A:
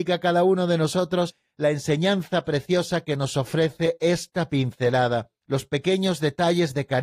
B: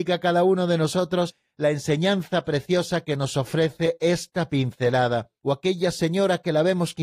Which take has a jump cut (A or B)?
B